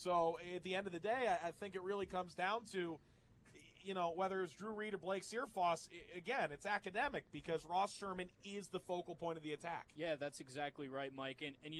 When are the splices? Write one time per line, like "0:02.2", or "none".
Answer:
none